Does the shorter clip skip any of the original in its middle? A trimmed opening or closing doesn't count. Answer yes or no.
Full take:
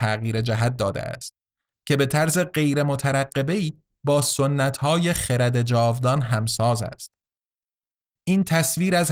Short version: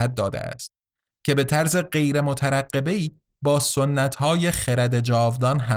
no